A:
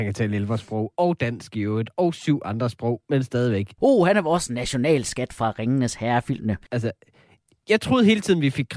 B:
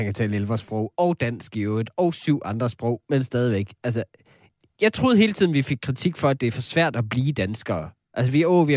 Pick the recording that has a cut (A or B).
A